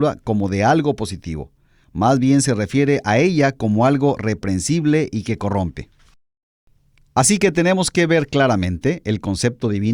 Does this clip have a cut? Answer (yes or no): no